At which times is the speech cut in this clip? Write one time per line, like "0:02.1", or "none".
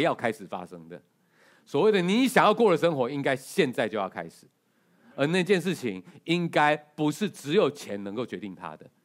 none